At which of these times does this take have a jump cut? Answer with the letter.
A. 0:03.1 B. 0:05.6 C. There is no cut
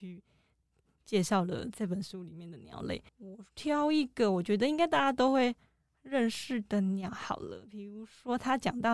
A